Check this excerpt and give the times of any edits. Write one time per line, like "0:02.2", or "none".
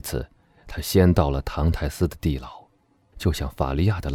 0:03.1